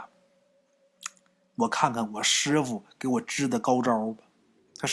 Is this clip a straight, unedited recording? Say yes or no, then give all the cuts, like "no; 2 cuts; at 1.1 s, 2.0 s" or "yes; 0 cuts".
yes; 0 cuts